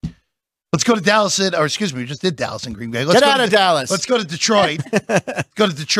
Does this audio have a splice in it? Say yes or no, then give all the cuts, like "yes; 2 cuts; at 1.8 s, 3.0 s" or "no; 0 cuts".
no; 0 cuts